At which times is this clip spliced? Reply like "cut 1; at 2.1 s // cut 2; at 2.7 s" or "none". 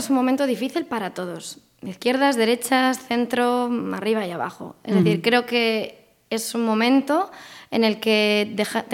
none